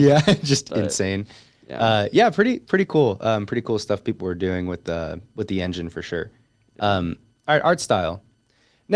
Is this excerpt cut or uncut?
uncut